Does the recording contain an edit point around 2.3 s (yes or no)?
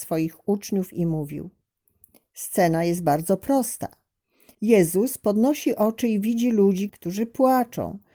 no